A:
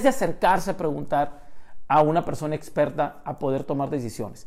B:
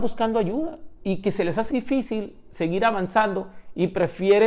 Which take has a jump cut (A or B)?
B